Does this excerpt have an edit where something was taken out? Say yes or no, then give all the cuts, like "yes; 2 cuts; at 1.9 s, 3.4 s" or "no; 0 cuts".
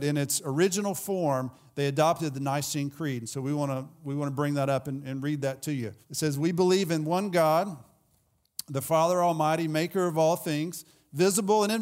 yes; 1 cut; at 6.0 s